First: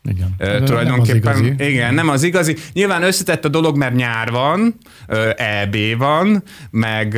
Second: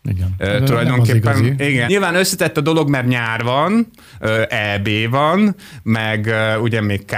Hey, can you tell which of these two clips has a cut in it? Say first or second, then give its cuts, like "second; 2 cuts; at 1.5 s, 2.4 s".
second; 1 cut; at 1.9 s